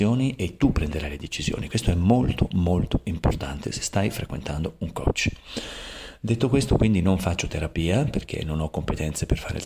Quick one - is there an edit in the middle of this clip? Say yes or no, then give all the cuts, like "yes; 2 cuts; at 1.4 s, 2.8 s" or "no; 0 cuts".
no; 0 cuts